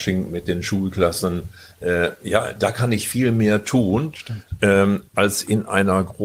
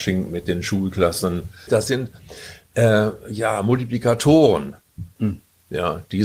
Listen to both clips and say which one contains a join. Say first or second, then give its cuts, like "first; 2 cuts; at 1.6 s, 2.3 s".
second; 2 cuts; at 1.7 s, 5.2 s